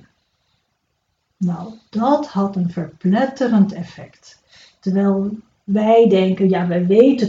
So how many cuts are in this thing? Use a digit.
0